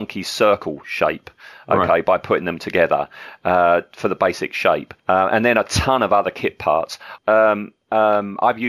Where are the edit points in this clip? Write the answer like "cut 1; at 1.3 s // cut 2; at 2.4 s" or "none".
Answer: cut 1; at 5.0 s // cut 2; at 7.2 s